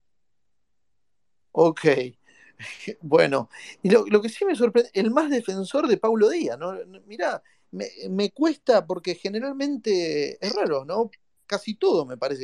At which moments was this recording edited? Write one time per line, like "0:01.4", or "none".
none